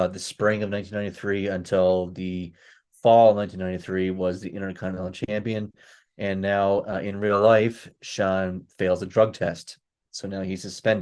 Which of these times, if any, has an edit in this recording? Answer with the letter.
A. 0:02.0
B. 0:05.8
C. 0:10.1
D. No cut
D